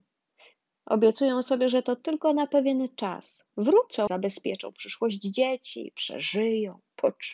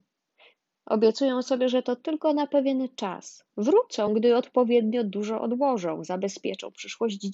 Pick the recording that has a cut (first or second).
first